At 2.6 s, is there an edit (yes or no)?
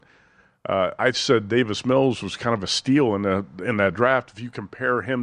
no